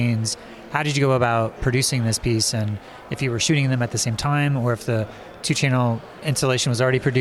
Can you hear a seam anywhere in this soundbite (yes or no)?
no